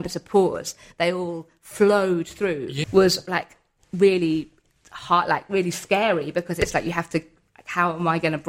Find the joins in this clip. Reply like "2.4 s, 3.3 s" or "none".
2.8 s